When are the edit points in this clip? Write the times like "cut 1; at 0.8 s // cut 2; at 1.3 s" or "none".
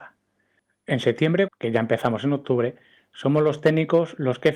cut 1; at 1.5 s